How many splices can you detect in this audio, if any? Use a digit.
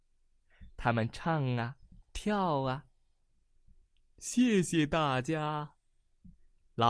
0